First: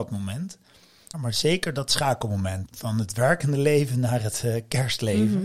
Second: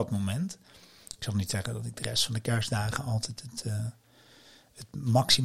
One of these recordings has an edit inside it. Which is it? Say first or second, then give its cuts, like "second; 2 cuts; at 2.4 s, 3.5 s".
first; 2 cuts; at 1.1 s, 2.6 s